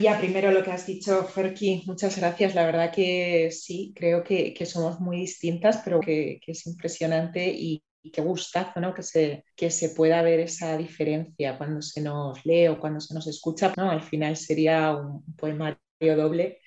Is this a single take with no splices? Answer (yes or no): no